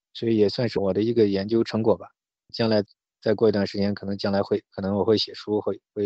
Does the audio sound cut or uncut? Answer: uncut